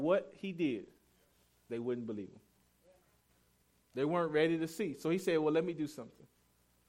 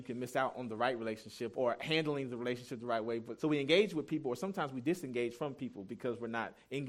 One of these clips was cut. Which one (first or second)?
second